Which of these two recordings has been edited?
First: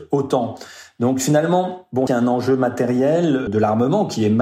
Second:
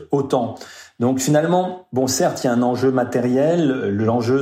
first; 2 cuts; at 2.1 s, 3.5 s

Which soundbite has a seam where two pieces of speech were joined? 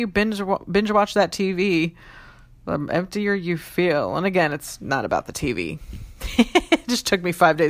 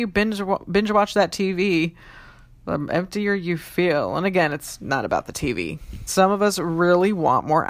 second; 1 cut; at 6.1 s

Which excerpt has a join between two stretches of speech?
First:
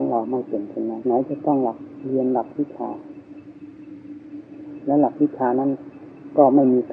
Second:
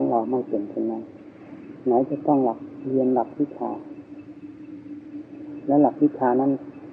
first; 1 cut; at 1.0 s

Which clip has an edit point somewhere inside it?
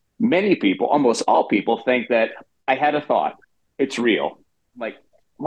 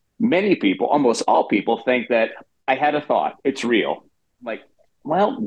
second; 1 cut; at 3.4 s

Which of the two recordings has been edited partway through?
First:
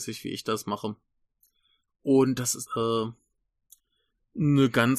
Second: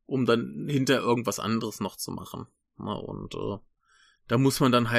first; 1 cut; at 2.7 s

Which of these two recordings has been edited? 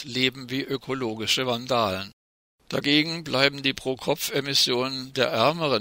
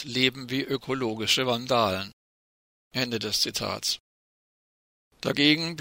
first; 1 cut; at 2.6 s

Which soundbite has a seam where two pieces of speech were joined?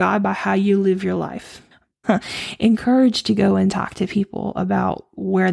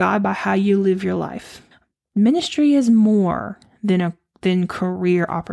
first; 1 cut; at 2.0 s

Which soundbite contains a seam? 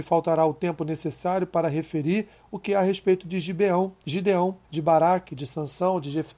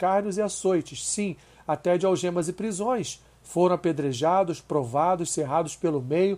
first; 1 cut; at 4.6 s

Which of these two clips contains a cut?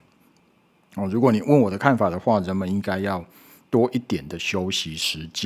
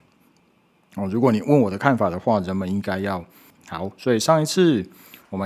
second; 1 cut; at 3.5 s

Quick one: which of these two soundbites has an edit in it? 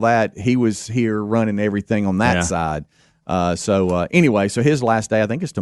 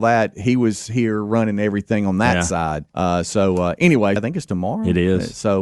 second; 2 cuts; at 2.9 s, 4.2 s

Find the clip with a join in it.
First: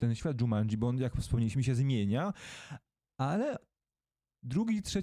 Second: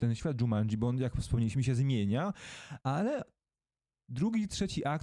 second; 1 cut; at 2.8 s

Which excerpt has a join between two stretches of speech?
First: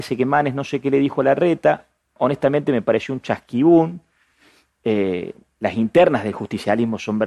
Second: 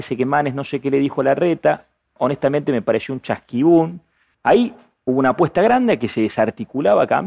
second; 1 cut; at 4.3 s

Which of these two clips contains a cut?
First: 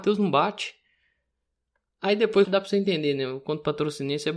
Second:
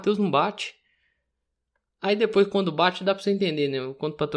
first; 1 cut; at 2.4 s

